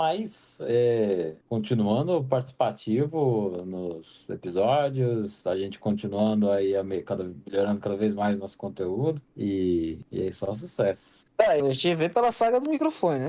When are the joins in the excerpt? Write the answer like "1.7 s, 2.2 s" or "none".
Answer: 11.6 s